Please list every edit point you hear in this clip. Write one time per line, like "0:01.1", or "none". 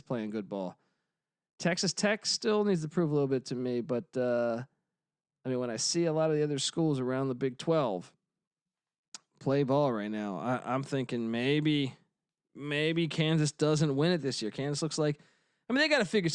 none